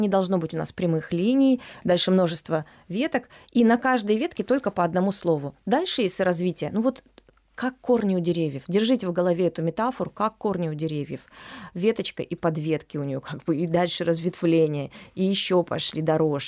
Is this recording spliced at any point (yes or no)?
no